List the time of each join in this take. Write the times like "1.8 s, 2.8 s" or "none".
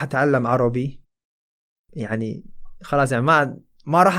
none

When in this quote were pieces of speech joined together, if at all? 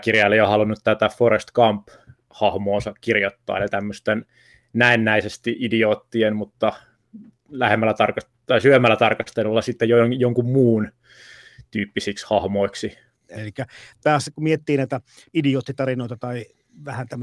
13.3 s

